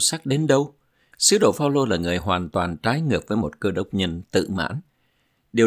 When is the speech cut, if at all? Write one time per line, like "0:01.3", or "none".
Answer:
0:01.1

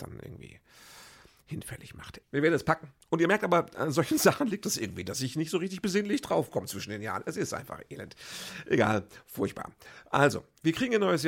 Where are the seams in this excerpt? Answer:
0:02.2

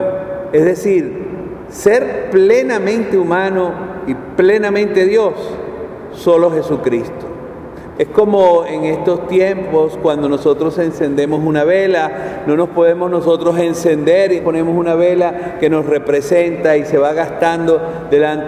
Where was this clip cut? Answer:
0:07.9
0:14.4

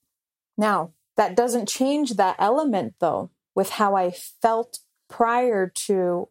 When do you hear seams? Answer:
none

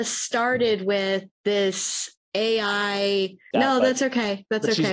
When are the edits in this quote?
0:01.3
0:03.5

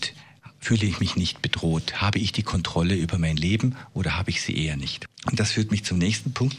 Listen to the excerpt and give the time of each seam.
none

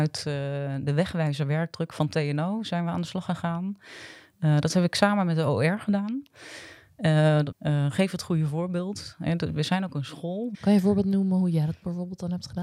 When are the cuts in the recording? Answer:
0:07.5
0:10.5

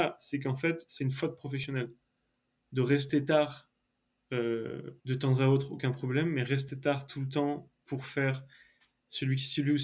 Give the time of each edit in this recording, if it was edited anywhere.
0:05.0

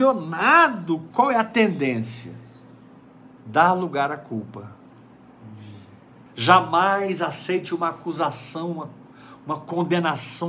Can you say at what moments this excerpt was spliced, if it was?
0:06.3

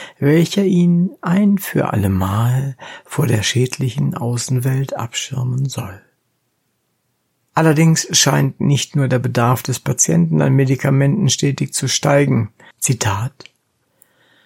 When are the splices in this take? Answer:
0:07.5
0:12.7

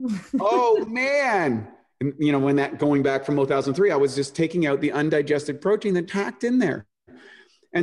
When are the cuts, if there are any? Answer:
0:06.1

